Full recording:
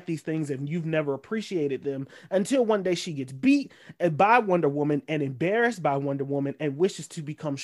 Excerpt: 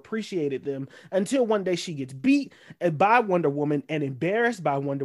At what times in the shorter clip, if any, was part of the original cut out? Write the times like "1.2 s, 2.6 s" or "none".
none